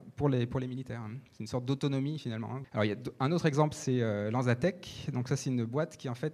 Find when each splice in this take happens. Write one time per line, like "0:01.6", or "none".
0:02.6

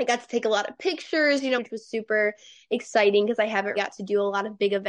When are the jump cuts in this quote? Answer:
0:01.6
0:03.8

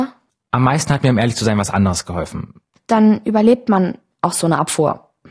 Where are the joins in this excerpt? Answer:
0:02.8

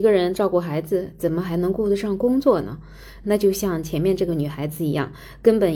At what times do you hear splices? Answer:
0:03.2

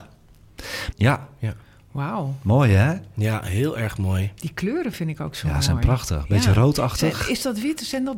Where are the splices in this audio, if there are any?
0:00.9

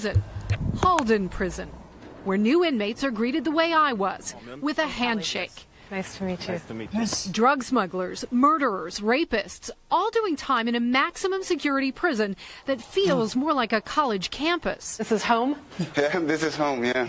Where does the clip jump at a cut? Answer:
none

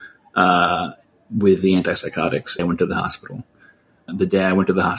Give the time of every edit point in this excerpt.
0:02.6
0:04.1

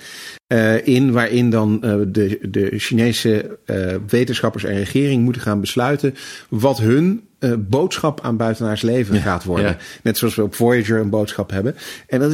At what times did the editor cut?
none

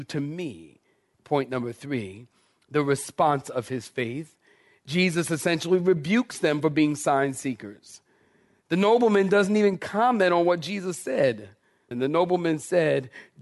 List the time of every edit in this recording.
0:01.1
0:11.9

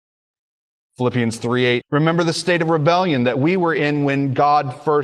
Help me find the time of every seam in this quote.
0:01.8

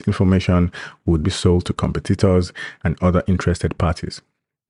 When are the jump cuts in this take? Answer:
0:01.2

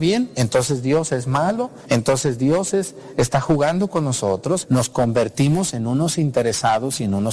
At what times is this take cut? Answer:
0:01.8
0:04.6

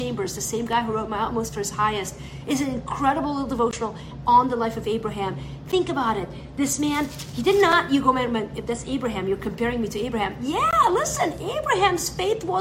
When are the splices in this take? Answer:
none

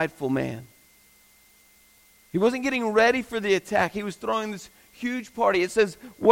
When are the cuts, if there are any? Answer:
none

